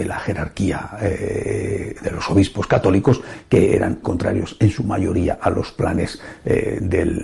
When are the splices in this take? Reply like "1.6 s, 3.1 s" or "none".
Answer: 4.0 s